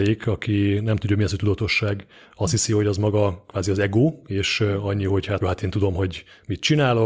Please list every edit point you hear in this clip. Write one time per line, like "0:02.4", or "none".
0:05.4